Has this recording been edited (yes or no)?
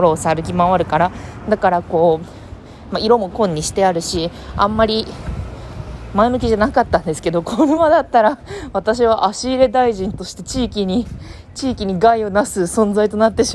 yes